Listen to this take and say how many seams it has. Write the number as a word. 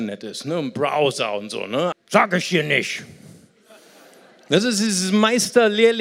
one